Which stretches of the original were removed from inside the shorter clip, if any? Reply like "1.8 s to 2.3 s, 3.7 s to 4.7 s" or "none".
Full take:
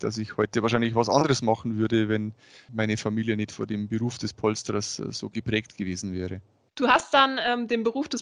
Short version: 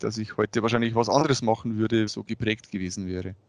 2.1 s to 5.1 s